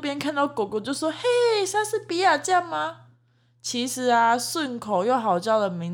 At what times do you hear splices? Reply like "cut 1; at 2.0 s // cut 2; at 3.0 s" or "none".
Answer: none